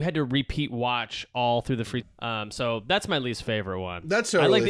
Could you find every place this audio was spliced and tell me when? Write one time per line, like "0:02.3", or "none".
0:02.0